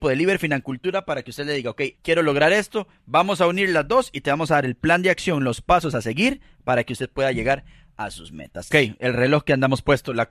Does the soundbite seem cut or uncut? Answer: cut